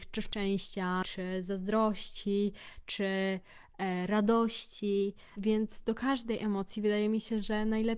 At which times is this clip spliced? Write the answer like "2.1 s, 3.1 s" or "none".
5.3 s